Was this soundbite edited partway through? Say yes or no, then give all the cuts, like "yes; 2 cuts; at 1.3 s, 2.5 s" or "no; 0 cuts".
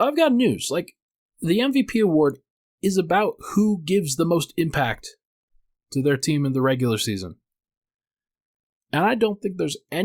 no; 0 cuts